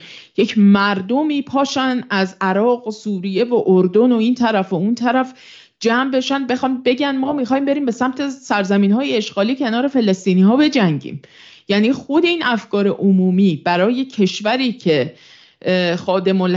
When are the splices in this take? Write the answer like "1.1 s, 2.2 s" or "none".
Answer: none